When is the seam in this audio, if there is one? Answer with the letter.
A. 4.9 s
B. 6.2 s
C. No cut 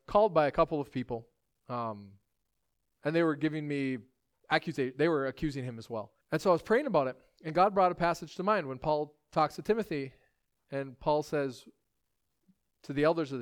B